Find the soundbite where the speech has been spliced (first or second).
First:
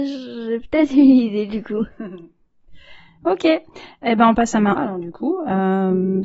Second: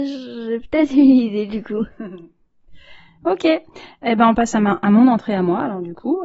first